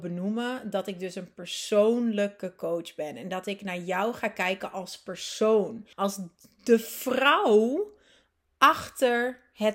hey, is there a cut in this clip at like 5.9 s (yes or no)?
yes